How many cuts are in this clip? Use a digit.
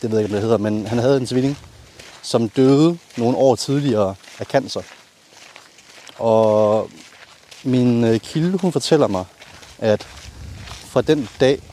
0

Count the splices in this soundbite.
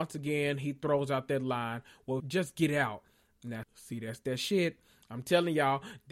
2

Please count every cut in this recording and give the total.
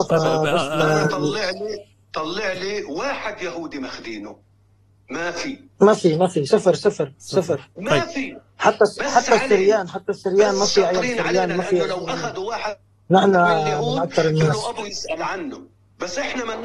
0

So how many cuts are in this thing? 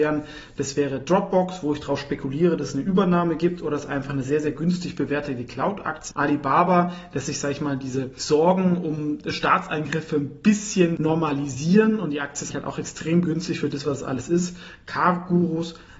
2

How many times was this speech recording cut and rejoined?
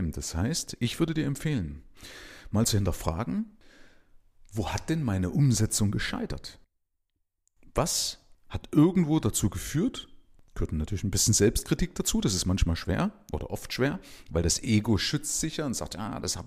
0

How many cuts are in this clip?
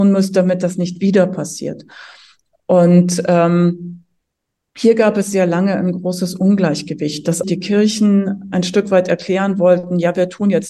1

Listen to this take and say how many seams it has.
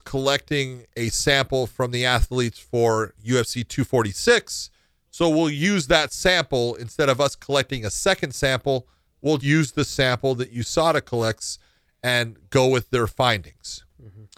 1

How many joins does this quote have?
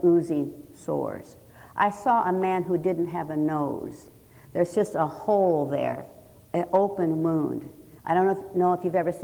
1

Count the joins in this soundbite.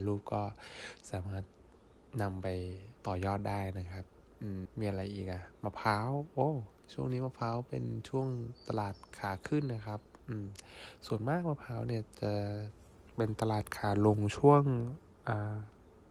2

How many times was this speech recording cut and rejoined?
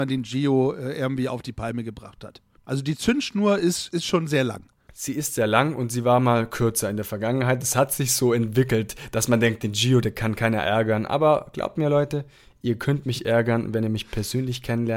0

